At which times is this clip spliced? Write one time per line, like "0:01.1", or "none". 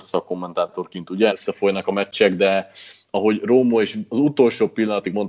0:01.3

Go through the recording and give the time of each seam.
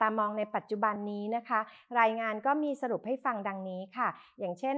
none

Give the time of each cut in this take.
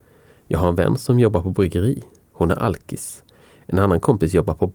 none

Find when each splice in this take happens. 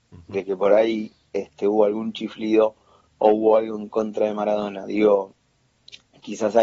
none

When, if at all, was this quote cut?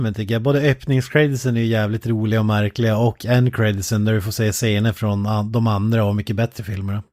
none

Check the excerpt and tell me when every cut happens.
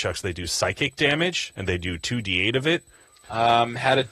0:03.1

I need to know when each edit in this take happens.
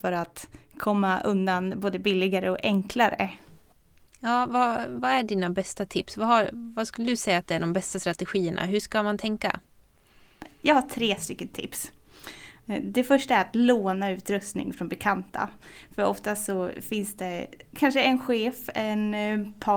none

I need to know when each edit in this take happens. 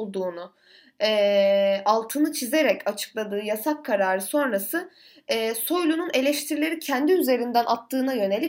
none

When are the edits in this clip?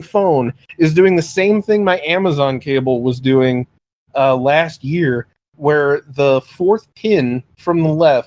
none

